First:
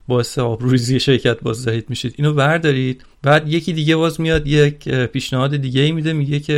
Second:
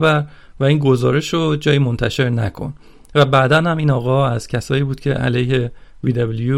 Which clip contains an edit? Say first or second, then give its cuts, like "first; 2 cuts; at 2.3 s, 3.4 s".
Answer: first; 1 cut; at 3.1 s